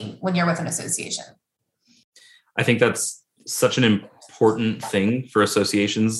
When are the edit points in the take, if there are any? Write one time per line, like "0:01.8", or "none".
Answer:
none